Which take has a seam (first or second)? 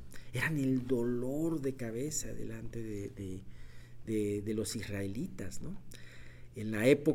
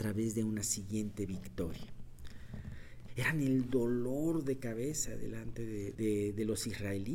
second